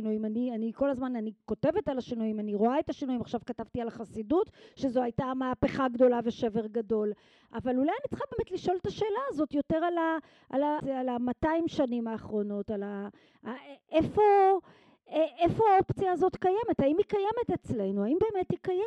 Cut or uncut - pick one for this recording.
cut